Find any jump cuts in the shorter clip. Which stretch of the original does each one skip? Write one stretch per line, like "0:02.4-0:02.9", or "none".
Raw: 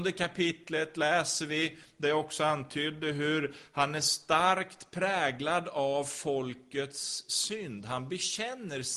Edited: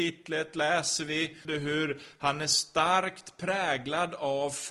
0:01.9-0:03.0